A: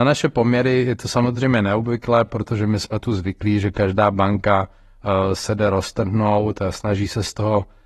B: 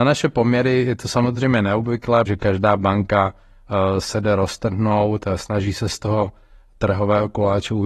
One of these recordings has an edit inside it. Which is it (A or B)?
B